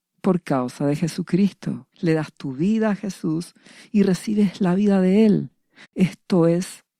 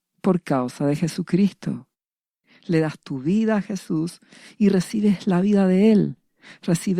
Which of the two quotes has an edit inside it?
first; 2 cuts; at 1.9 s, 5.8 s

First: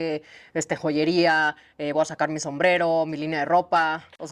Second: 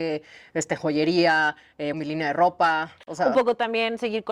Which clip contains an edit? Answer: second; 1 cut; at 1.9 s

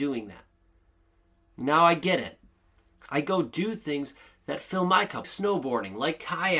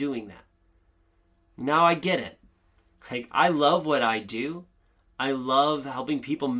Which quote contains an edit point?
first; 2 cuts; at 3.1 s, 5.2 s

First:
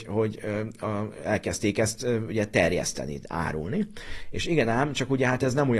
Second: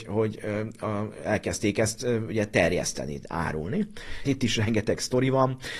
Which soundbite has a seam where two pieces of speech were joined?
second; 1 cut; at 4.2 s

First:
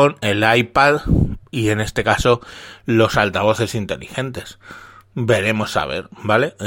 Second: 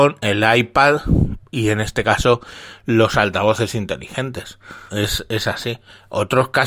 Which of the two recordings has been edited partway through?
second; 1 cut; at 4.9 s

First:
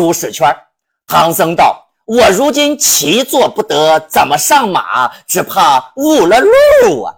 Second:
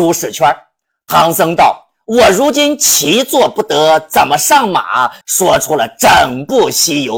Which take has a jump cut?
second; 1 cut; at 5.2 s

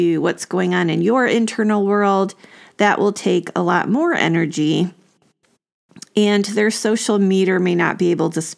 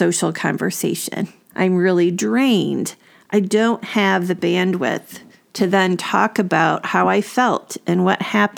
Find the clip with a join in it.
second; 1 cut; at 1.5 s

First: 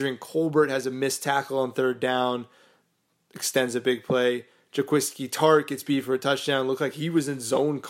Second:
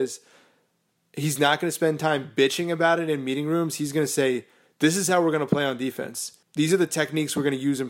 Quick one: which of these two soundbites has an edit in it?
second; 1 cut; at 6.4 s

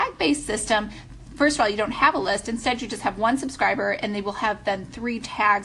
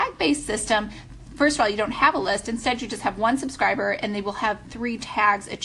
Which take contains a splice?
second; 1 cut; at 4.6 s

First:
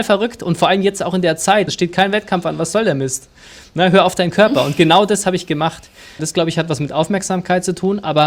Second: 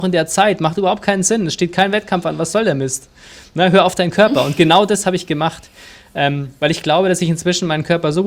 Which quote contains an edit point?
first; 2 cuts; at 1.7 s, 6.2 s

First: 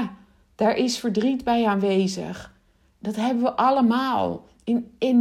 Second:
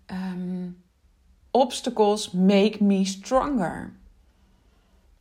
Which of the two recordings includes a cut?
second; 1 cut; at 1.5 s

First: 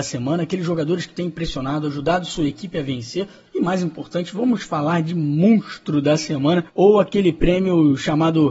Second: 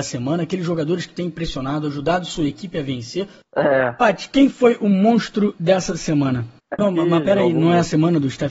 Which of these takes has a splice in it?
second; 2 cuts; at 3.4 s, 6.8 s

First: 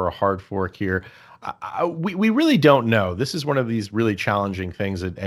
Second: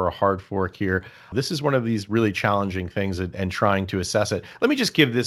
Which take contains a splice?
second; 1 cut; at 1.3 s

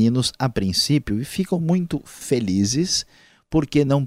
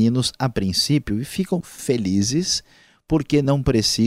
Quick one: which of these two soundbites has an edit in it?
second; 1 cut; at 1.6 s

